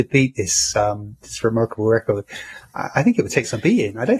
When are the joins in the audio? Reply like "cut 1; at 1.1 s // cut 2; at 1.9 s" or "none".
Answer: cut 1; at 1.2 s